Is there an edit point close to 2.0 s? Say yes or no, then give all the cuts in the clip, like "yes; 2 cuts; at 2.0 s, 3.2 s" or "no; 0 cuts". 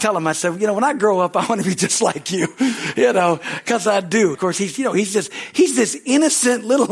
no; 1 cut; at 4.3 s